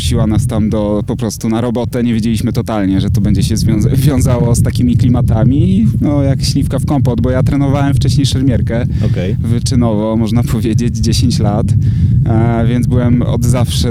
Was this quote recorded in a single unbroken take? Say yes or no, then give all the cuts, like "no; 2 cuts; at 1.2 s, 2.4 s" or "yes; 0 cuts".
yes; 0 cuts